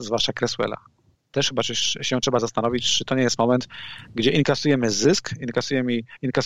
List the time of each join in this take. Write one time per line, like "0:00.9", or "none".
0:01.1